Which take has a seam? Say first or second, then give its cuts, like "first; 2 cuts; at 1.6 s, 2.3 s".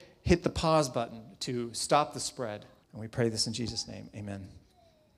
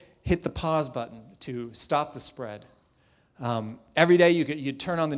first; 1 cut; at 2.8 s